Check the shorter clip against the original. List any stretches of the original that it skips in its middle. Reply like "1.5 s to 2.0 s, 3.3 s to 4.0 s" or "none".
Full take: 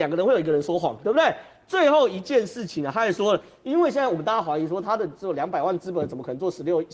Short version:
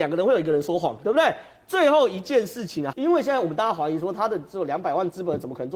2.9 s to 3.6 s